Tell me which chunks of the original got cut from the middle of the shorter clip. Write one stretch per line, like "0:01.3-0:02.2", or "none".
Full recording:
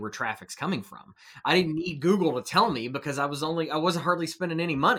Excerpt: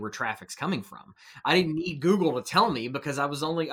none